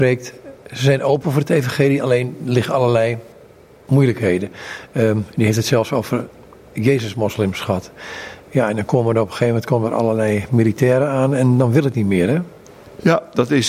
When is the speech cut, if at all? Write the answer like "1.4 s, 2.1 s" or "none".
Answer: none